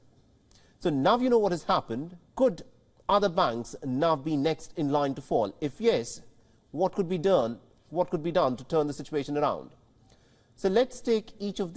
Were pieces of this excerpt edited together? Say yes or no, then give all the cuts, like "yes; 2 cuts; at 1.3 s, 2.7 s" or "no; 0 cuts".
yes; 1 cut; at 2.2 s